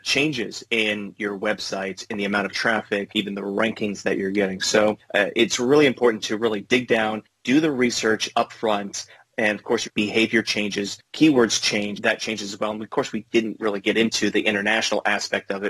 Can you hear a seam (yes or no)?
yes